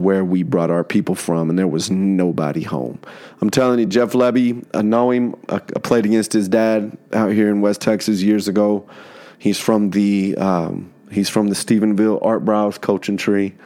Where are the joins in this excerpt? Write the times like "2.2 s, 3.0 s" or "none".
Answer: none